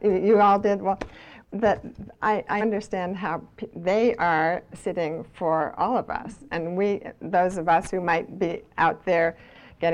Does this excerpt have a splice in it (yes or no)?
yes